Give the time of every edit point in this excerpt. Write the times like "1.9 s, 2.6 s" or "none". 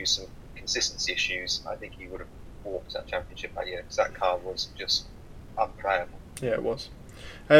none